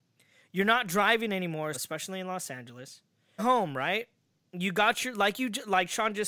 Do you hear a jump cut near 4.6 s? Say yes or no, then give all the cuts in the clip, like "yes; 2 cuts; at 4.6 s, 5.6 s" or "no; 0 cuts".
no; 2 cuts; at 1.7 s, 3.4 s